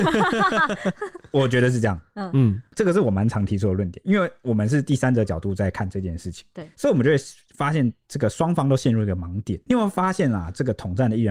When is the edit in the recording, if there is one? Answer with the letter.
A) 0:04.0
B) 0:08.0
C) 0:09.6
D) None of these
B